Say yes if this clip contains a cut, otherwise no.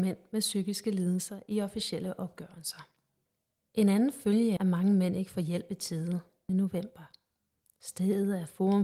yes